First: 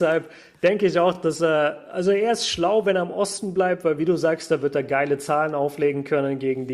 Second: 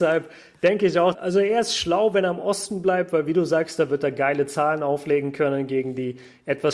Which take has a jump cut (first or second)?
second